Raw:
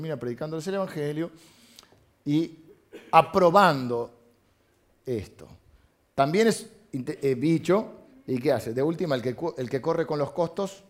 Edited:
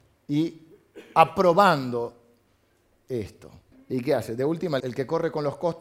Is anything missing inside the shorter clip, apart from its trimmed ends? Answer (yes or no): yes